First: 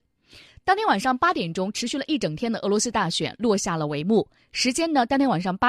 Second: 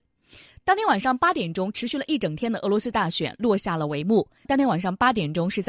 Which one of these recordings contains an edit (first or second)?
second